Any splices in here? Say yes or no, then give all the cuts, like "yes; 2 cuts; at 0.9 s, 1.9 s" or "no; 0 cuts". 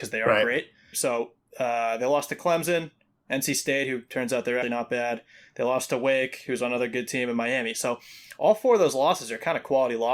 yes; 2 cuts; at 0.9 s, 4.6 s